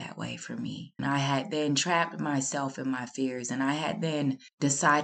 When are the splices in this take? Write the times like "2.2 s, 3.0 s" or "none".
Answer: 1.0 s